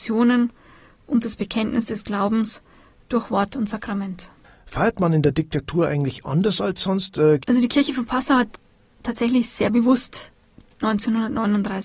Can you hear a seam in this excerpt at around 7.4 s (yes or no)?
yes